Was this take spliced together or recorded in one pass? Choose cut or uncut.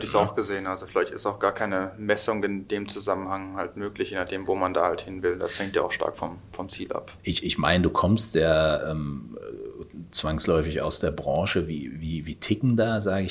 uncut